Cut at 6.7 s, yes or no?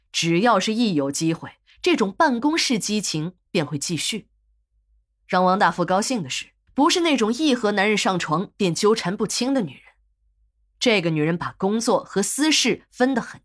yes